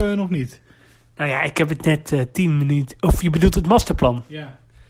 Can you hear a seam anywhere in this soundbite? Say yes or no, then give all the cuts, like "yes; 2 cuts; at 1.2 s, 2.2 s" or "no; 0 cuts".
no; 0 cuts